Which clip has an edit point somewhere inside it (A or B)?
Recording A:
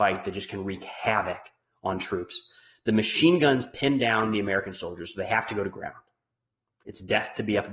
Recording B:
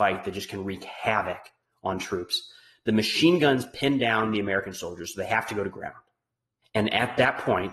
B